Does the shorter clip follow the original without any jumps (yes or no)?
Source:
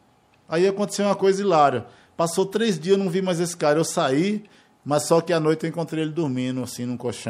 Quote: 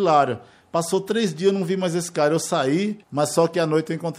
no